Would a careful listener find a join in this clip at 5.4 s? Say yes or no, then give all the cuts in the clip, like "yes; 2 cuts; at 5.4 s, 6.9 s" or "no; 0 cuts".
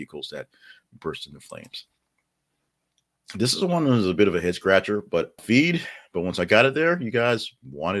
yes; 1 cut; at 5.4 s